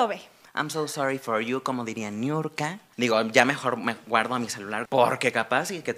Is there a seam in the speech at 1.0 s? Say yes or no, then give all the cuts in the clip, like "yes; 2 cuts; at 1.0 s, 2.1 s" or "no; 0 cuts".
no; 2 cuts; at 2.9 s, 4.9 s